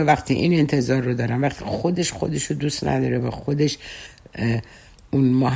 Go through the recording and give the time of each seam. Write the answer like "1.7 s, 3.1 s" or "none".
none